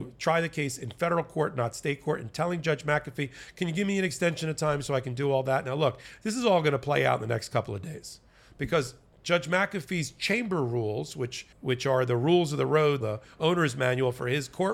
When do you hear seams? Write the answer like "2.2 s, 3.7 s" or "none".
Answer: 11.5 s, 13.0 s